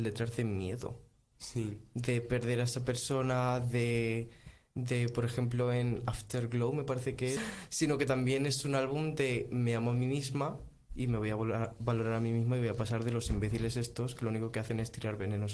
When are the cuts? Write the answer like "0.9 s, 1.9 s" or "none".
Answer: 7.4 s